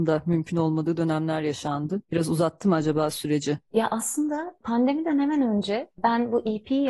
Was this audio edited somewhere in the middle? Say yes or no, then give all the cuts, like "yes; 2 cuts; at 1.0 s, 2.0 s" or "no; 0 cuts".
no; 0 cuts